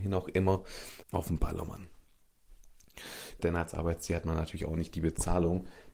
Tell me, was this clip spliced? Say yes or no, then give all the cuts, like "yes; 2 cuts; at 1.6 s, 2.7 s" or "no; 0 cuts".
yes; 2 cuts; at 1.0 s, 3.4 s